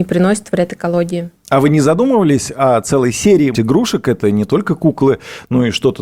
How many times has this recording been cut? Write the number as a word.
one